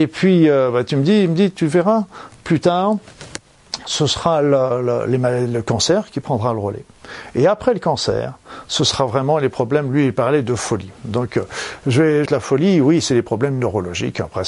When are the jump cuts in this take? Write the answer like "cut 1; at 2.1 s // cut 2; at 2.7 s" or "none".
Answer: cut 1; at 12.3 s